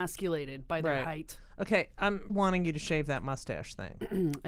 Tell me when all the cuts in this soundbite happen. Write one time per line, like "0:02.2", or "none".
0:02.3